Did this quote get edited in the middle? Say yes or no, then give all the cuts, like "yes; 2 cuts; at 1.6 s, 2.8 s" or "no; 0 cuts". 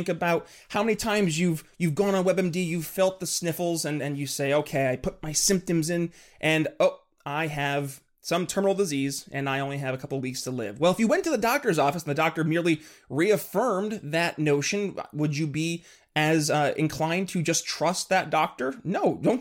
no; 0 cuts